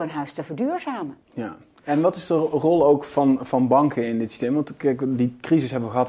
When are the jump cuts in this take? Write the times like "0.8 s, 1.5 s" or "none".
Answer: 1.2 s